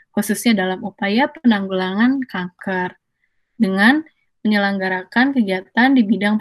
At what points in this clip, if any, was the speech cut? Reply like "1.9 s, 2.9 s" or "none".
none